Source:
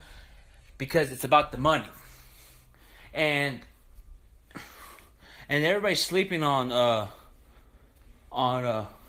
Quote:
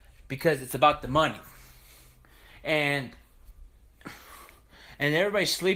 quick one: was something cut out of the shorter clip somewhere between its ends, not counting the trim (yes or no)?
no